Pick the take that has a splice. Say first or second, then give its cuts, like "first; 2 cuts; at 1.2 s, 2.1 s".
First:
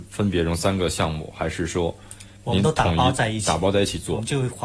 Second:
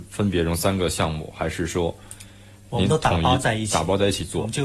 first; 1 cut; at 2.4 s